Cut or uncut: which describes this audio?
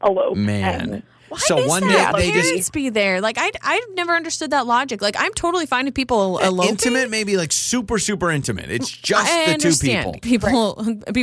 cut